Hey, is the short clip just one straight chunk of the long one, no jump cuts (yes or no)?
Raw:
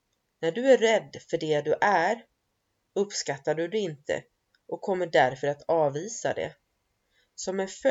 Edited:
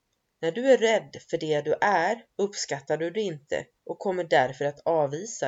no